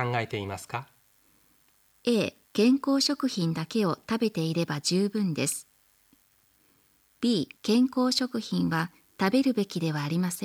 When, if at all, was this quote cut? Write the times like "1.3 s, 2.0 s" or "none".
2.4 s, 7.6 s